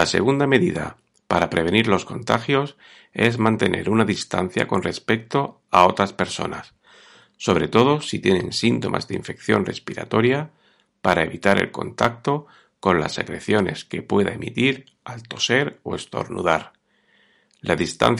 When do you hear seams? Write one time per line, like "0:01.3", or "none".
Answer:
none